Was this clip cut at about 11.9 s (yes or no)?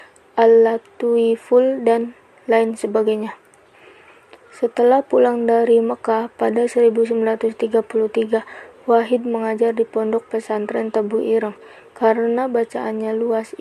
no